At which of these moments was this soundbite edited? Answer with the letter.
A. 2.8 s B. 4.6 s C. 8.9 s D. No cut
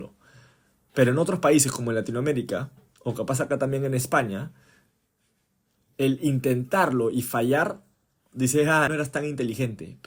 C